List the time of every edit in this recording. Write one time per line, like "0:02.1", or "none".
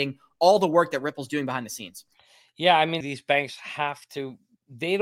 0:03.0